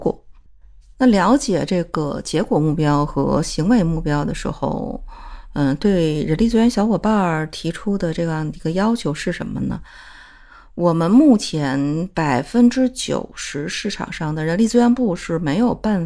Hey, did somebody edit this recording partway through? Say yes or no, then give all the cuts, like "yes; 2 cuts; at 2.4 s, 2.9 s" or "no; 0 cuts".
no; 0 cuts